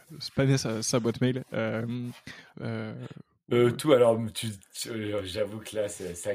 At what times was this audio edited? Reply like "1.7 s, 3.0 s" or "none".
2.5 s